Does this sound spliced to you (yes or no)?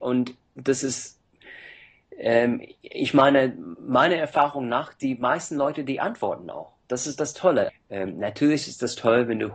yes